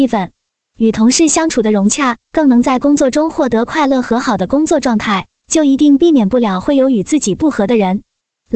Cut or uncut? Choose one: cut